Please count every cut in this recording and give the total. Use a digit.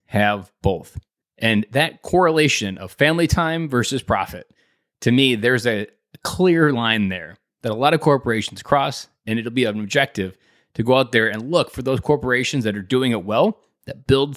1